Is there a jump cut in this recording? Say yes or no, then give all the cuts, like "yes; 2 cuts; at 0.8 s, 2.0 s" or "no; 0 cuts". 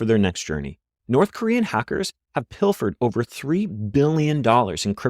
yes; 1 cut; at 1.0 s